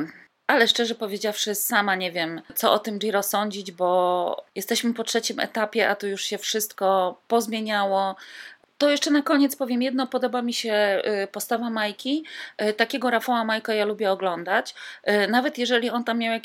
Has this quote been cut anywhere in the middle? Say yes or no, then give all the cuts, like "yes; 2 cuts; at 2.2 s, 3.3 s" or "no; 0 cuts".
no; 0 cuts